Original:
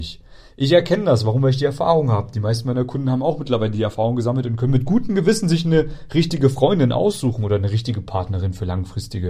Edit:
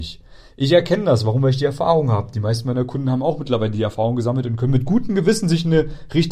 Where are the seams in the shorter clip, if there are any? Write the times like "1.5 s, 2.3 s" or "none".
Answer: none